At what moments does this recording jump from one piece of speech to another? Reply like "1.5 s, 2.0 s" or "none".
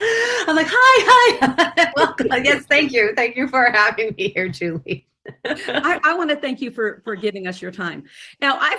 none